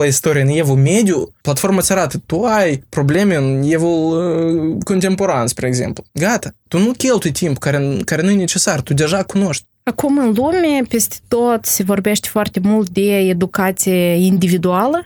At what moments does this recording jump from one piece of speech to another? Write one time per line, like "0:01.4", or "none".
0:06.1